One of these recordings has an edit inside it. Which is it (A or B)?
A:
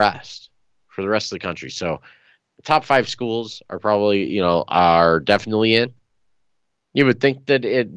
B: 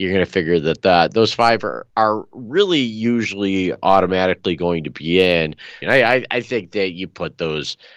B